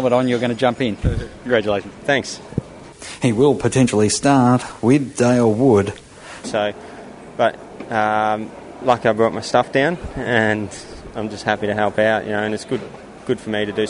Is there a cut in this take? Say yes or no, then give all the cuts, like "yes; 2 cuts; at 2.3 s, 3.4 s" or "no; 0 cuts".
yes; 2 cuts; at 1.0 s, 6.4 s